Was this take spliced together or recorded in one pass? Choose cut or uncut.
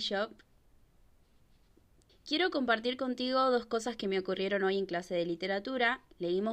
cut